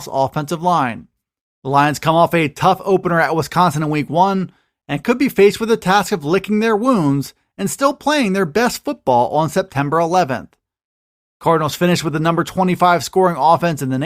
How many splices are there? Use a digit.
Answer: 2